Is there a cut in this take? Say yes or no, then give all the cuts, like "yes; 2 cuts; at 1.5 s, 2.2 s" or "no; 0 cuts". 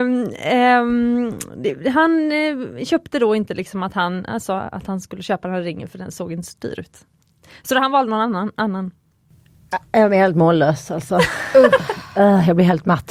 no; 0 cuts